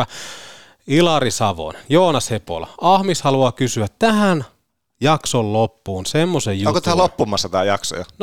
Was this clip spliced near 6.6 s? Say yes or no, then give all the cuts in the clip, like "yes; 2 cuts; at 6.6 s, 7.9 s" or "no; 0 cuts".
no; 0 cuts